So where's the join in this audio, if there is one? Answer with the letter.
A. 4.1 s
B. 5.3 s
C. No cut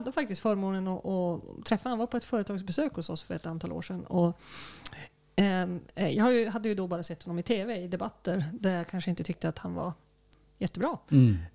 C